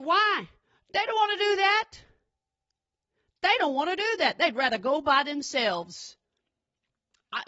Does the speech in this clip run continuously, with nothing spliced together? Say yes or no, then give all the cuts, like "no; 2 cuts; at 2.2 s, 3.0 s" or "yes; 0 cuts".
yes; 0 cuts